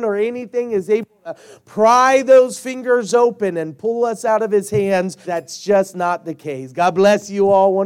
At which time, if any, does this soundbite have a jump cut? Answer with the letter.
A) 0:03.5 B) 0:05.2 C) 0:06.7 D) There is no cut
B